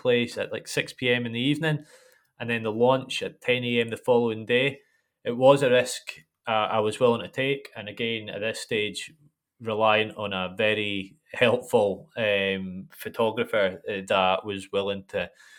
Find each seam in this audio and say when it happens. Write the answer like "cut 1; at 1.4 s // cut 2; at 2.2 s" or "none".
none